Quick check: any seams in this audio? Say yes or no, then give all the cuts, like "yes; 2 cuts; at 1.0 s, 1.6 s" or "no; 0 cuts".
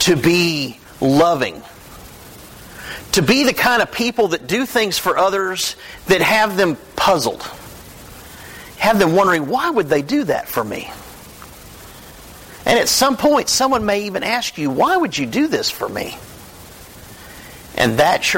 no; 0 cuts